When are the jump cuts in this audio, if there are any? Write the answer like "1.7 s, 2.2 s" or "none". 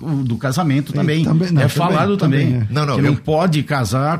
none

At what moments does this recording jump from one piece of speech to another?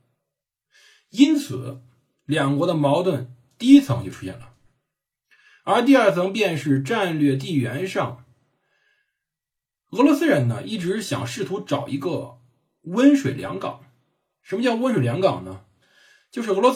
none

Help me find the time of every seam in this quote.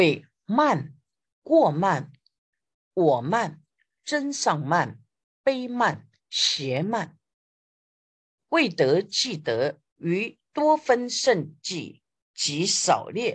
2.9 s, 8.4 s, 9.9 s

